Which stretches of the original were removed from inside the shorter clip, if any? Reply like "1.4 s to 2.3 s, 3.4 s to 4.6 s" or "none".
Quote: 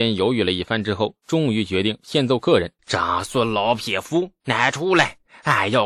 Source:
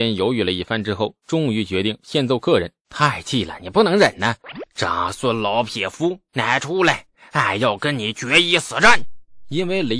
2.8 s to 4.7 s